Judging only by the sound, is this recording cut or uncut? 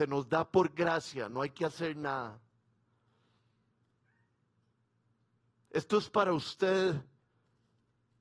uncut